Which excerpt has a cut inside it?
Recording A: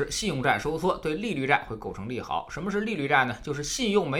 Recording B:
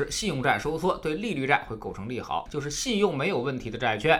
B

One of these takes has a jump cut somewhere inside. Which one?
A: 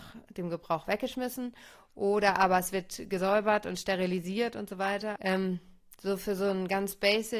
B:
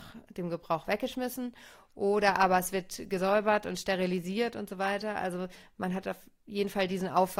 A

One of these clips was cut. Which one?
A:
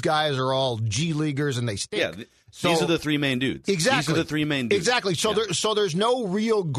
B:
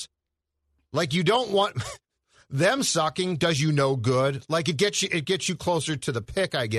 A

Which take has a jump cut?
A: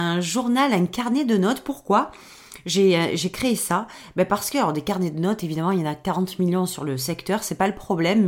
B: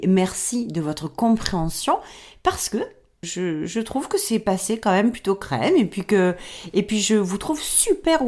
B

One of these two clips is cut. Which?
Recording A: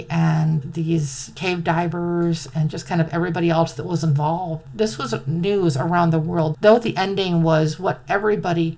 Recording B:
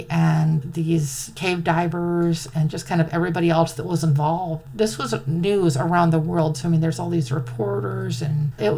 A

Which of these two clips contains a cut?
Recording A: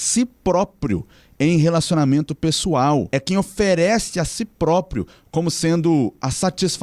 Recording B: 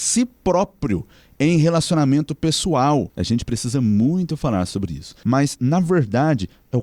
B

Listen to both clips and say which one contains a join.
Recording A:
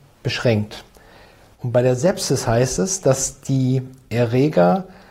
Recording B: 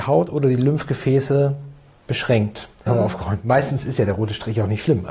B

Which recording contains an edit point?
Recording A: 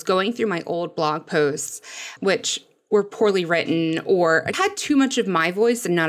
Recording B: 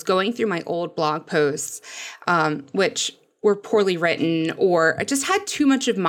A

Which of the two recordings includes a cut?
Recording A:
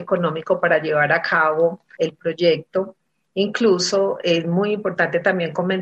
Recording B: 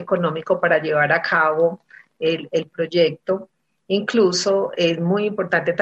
A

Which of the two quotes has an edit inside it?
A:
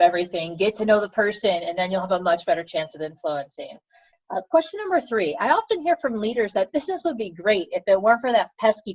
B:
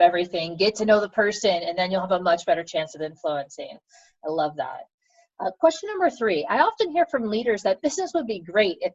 A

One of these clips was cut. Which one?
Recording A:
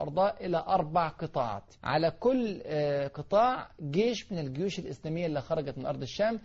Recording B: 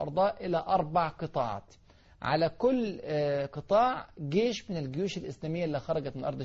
A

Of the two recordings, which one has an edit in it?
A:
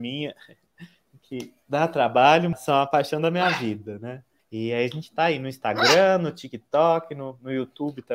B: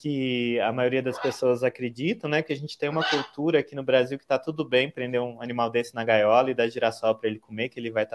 A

